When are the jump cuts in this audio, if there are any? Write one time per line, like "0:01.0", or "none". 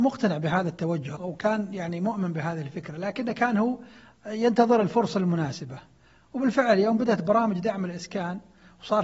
0:01.2

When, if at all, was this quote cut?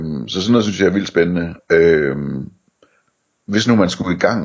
0:01.6

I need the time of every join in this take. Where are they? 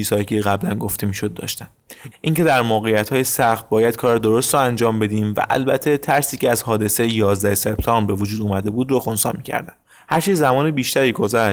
0:02.1

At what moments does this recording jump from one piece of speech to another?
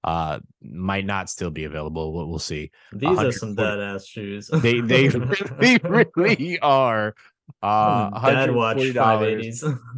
none

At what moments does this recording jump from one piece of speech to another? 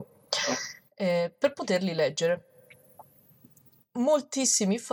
none

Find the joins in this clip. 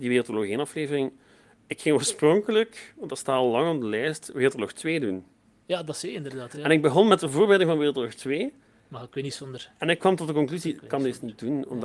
none

